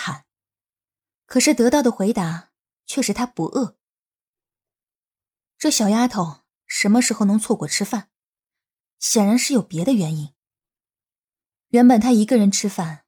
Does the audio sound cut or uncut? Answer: cut